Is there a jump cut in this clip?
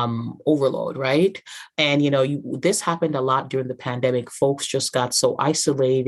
yes; 1 cut; at 1.7 s

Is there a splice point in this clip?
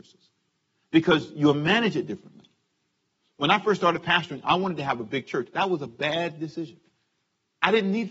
no; 0 cuts

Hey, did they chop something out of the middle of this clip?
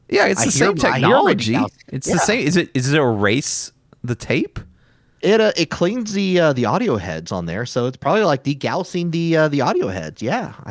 no; 0 cuts

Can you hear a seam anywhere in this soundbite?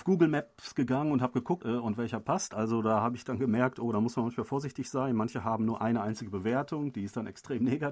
yes; 1 cut; at 1.6 s

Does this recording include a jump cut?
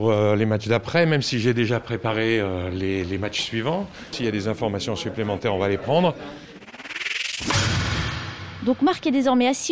no; 0 cuts

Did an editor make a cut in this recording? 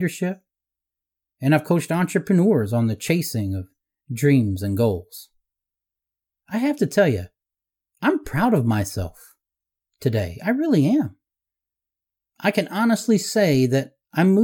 no; 0 cuts

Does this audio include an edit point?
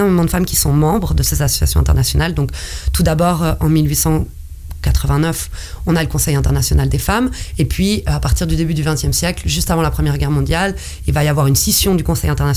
no; 0 cuts

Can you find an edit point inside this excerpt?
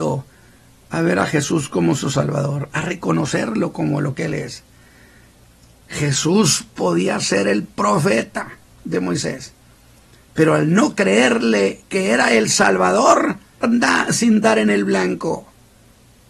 yes; 2 cuts; at 5.8 s, 13.6 s

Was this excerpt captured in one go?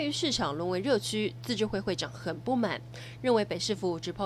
yes; 0 cuts

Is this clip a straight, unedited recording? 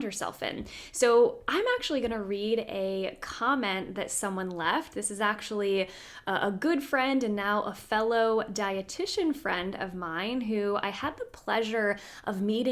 yes; 0 cuts

